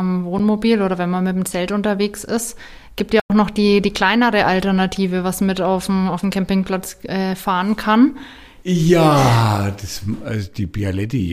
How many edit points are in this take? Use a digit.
1